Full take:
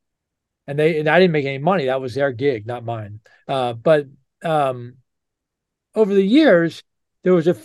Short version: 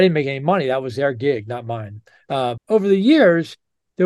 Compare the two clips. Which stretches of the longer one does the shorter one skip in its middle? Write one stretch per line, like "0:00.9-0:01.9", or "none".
0:03.8-0:05.8